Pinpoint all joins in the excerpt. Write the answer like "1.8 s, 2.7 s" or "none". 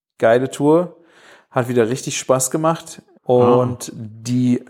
3.2 s